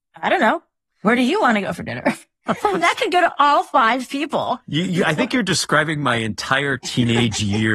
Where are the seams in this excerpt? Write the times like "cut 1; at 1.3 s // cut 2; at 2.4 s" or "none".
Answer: none